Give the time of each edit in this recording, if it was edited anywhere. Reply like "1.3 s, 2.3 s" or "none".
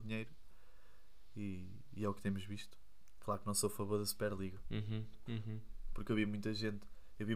3.2 s, 5.3 s